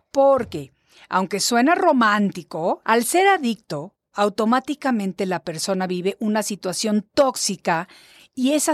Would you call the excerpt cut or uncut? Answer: cut